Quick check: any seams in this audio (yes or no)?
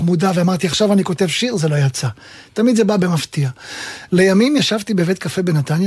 yes